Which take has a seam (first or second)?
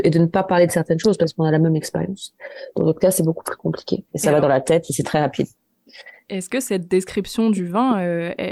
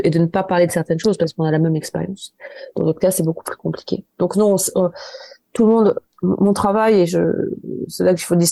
first